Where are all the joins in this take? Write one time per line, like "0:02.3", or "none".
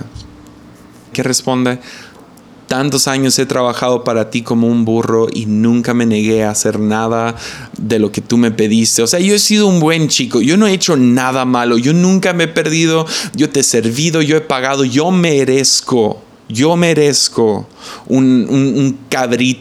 0:01.1